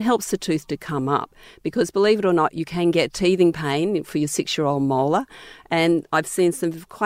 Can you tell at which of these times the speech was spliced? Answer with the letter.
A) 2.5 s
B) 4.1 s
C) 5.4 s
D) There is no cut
D